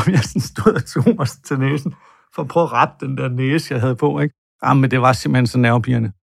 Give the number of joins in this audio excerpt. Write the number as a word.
one